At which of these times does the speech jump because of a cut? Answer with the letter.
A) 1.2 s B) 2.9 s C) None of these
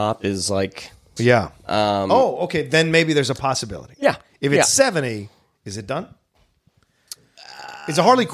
A